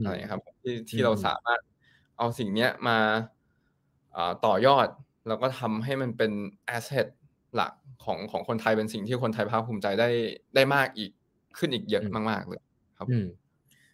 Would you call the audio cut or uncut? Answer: uncut